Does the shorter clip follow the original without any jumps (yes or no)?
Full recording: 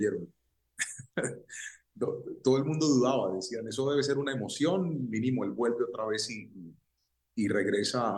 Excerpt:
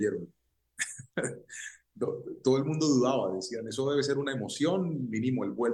yes